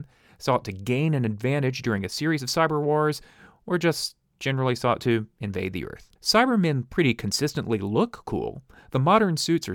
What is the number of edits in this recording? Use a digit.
1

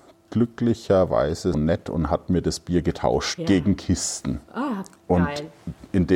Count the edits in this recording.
2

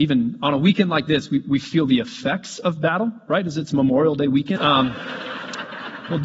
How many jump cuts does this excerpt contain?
1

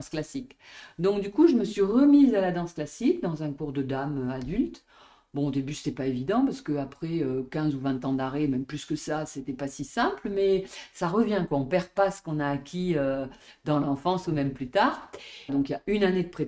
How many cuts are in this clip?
1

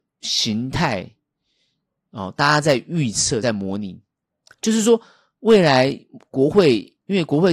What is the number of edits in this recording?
0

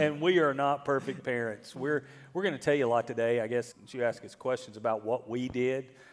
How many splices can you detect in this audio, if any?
1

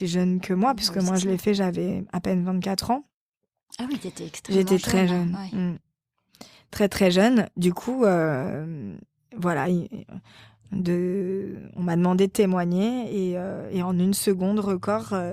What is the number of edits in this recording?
0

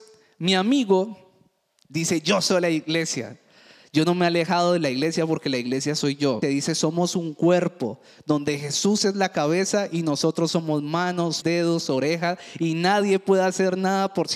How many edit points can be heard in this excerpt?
2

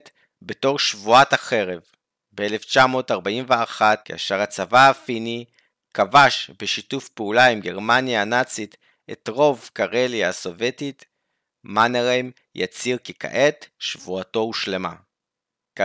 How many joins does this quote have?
1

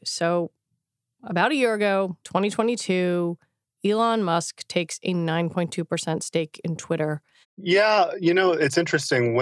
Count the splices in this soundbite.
2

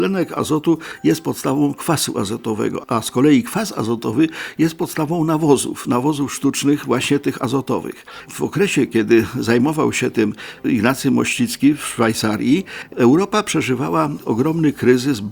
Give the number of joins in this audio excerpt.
0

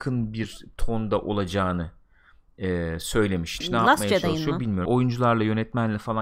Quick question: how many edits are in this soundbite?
2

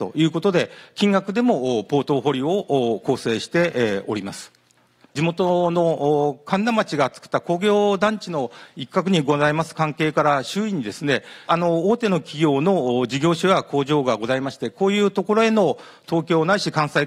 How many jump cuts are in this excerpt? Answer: 1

